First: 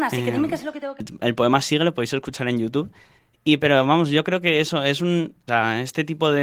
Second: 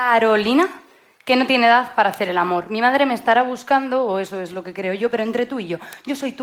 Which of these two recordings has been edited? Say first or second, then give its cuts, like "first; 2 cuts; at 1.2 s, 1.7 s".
first; 1 cut; at 5.5 s